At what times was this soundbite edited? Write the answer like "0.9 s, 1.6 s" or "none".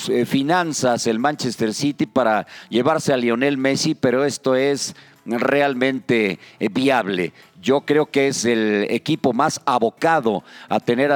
none

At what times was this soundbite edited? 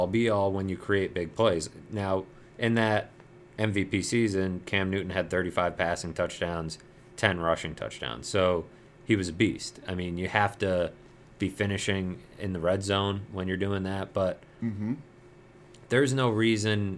none

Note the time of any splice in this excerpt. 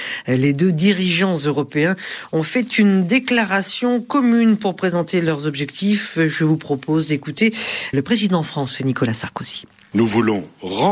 7.9 s

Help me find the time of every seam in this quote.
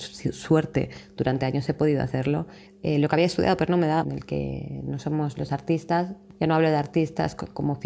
2.7 s, 4.0 s

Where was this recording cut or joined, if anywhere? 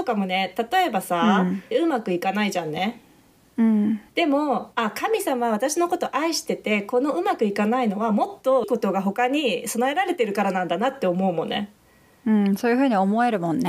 1.7 s, 4.1 s, 8.6 s

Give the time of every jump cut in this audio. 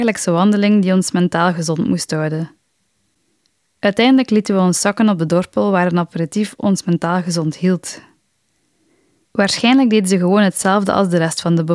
9.2 s

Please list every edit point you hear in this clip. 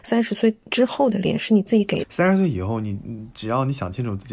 2.0 s

